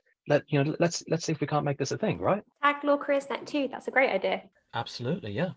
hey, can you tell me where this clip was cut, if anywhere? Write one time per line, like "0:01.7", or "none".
none